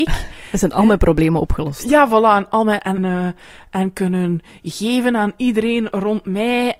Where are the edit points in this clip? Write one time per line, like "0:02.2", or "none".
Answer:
0:03.0